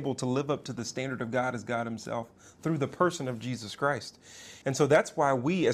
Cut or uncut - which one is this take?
cut